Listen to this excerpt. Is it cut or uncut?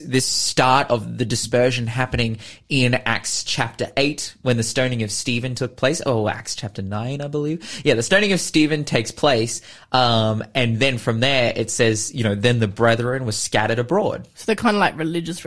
uncut